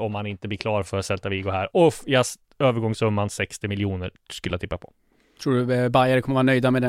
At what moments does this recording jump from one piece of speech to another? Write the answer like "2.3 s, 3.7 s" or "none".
none